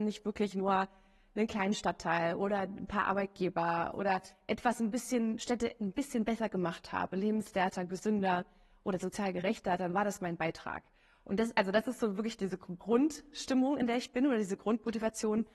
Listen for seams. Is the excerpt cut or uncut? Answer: uncut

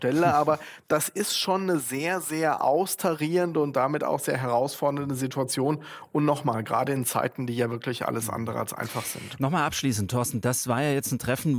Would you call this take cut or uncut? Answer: uncut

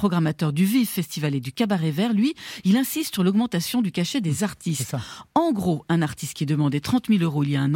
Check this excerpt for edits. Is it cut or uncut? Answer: uncut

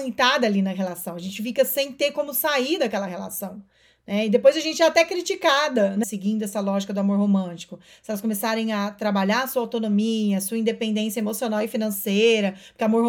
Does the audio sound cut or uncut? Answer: cut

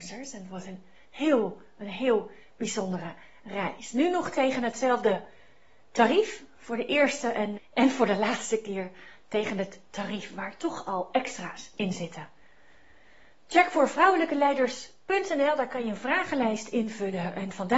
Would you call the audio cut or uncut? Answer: cut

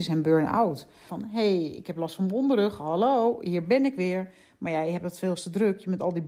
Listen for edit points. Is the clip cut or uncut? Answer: cut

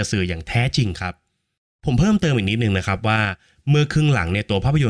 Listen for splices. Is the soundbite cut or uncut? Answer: uncut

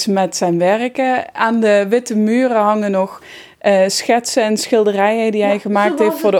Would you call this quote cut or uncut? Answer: uncut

